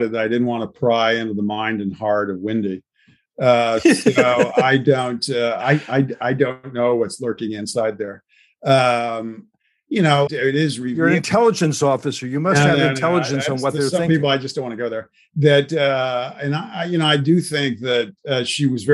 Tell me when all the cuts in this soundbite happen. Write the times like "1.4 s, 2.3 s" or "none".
10.3 s